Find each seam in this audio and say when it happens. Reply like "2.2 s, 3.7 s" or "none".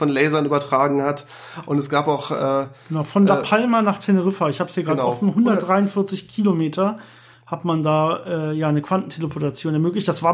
none